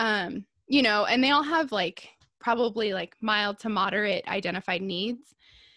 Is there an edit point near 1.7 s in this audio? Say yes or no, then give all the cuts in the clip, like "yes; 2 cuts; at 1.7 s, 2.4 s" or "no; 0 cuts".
no; 0 cuts